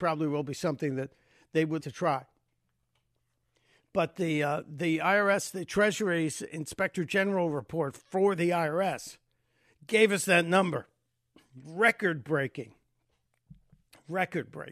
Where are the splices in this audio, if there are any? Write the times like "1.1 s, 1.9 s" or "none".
1.8 s